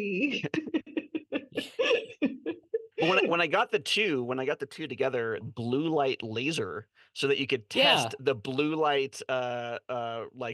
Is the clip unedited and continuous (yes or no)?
no